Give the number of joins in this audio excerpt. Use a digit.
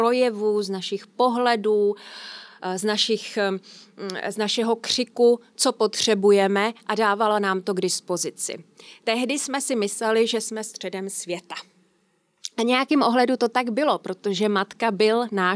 0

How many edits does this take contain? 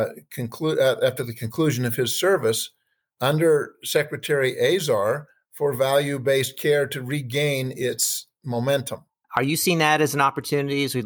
1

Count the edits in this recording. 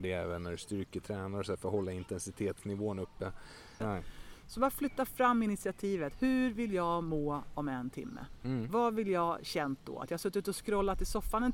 1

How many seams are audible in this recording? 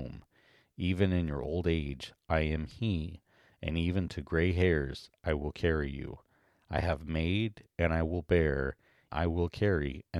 1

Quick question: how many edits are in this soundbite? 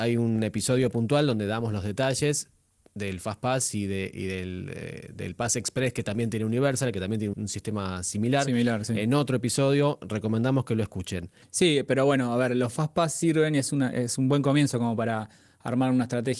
1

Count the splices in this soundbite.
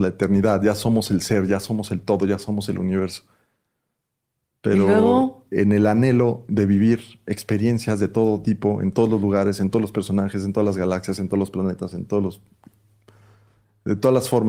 0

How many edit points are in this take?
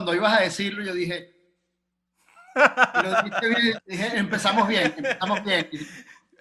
1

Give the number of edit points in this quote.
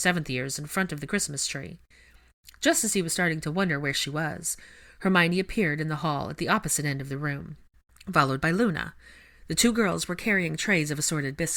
0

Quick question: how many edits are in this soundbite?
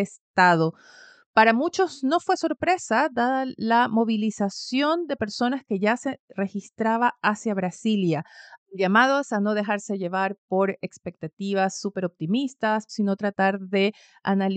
2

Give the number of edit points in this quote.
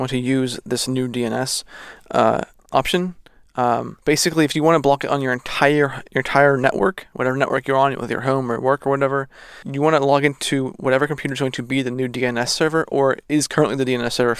2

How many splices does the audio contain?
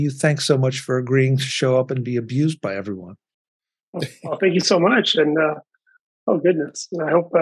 0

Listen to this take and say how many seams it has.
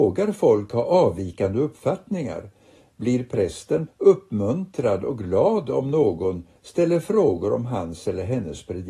2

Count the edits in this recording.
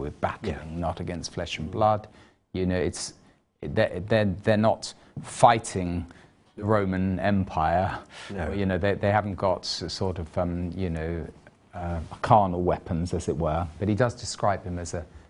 0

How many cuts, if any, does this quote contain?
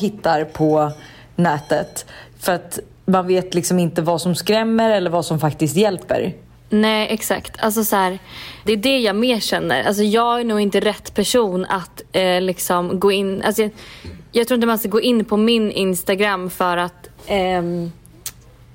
1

